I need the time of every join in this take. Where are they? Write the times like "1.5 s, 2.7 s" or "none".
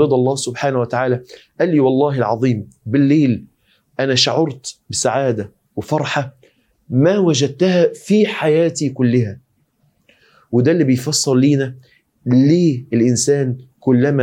none